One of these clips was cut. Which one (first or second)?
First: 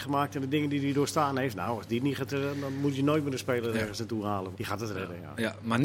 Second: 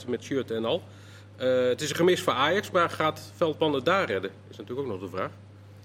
first